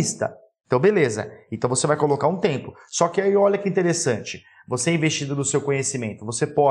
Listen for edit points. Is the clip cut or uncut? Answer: uncut